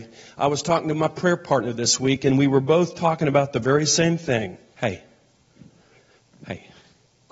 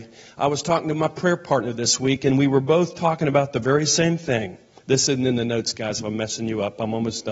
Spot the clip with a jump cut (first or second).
first